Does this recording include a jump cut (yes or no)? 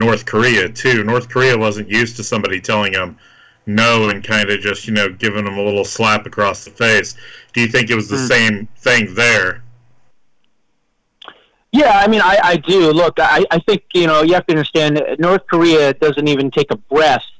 no